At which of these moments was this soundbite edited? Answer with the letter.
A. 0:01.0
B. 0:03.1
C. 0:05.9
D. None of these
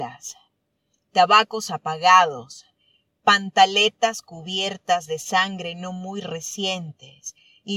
D